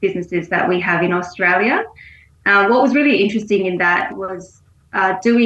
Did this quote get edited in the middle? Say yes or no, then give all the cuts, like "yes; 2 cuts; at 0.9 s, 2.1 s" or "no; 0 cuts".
no; 0 cuts